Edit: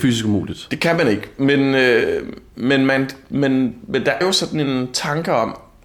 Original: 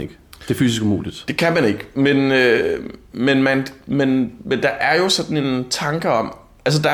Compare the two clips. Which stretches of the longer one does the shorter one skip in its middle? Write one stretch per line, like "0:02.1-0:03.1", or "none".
0:04.8-0:05.0